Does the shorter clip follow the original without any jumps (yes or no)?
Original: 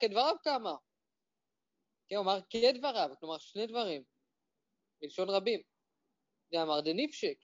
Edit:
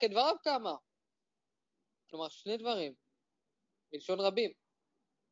no